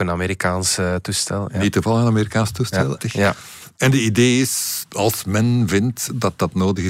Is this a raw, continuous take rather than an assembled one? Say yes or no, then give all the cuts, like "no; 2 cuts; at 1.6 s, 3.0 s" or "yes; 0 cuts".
no; 2 cuts; at 3.0 s, 4.9 s